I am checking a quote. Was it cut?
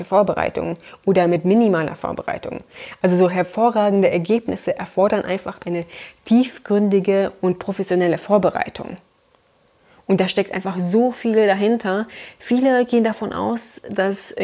no; 0 cuts

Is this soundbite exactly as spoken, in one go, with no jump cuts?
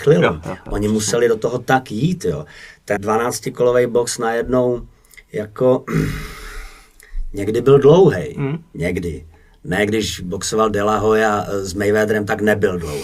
no; 1 cut; at 3.0 s

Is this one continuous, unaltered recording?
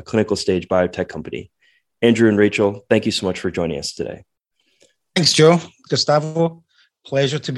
no; 1 cut; at 5.9 s

